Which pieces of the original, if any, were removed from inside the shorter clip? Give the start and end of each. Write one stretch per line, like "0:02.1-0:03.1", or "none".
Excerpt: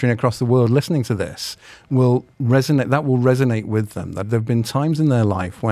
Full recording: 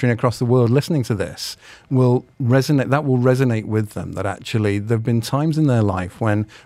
0:04.2-0:04.8